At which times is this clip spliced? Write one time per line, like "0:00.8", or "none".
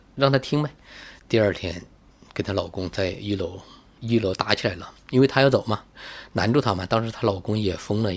none